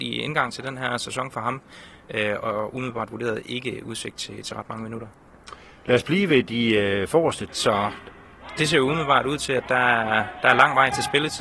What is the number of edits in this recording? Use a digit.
1